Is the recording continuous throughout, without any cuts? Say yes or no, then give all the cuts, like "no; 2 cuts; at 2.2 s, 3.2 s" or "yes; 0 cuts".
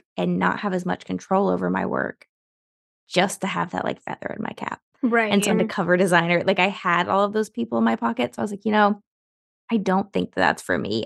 no; 1 cut; at 5.5 s